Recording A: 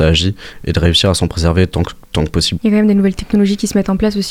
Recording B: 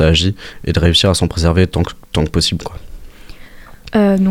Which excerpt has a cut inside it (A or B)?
A